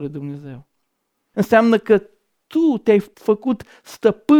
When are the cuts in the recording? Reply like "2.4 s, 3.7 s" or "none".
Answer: 1.3 s, 3.1 s